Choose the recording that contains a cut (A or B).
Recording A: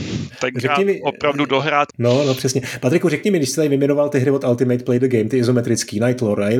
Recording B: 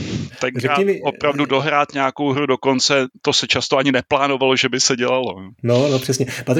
A